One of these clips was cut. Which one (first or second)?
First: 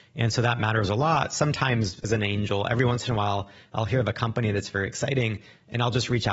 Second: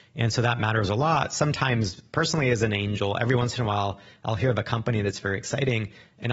first